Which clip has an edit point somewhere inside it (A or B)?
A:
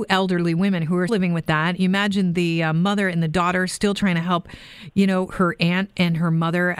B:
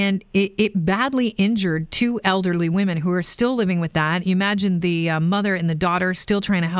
A